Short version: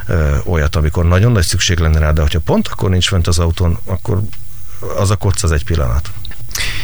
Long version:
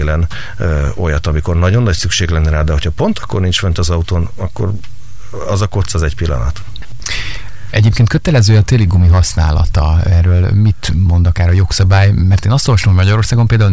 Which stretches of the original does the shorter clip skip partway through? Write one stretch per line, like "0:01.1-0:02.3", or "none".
none

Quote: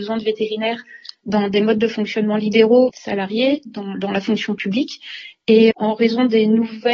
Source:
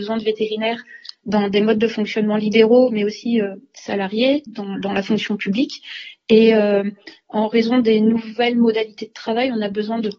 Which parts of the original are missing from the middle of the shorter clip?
0:02.9-0:03.7
0:06.5-0:07.2

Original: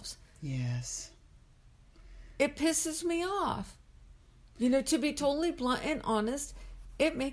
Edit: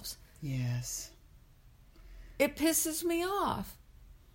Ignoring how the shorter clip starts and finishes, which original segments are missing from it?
none

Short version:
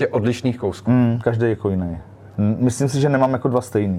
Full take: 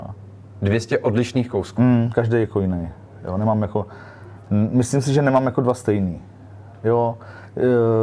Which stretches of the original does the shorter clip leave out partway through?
0:03.2-0:04.4

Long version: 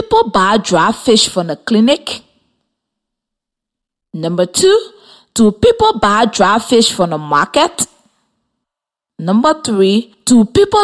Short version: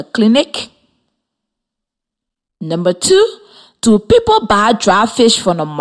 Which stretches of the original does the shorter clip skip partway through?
none

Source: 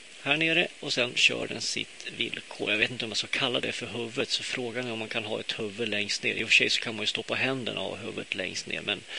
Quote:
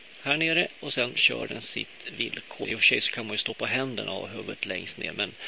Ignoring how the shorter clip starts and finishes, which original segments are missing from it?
0:02.6-0:06.3

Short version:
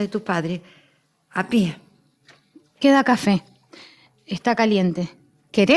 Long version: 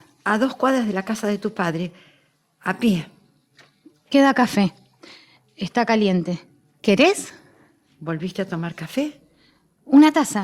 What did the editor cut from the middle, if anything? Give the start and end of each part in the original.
none

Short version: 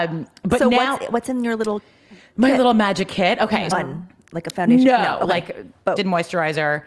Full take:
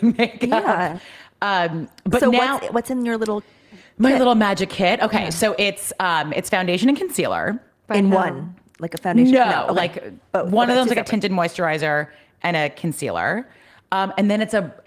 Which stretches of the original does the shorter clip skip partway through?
0:05.3-0:08.2
0:10.4-0:11.2

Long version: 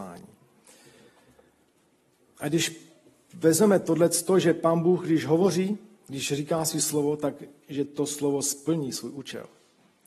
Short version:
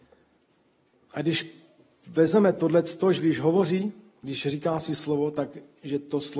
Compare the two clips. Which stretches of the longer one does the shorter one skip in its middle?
0:04.4-0:05.0

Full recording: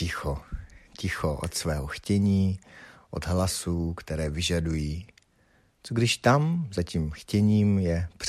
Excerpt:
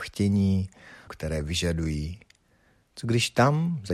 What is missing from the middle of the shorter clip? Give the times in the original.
0:03.0-0:03.9

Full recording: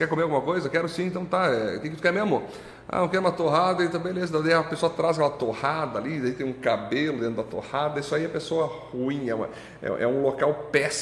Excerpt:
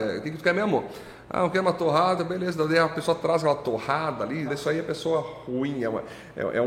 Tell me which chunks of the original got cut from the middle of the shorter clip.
0:03.8-0:03.9
0:06.2-0:07.9

